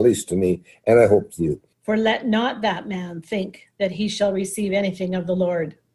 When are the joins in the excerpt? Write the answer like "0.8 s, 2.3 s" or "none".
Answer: 1.7 s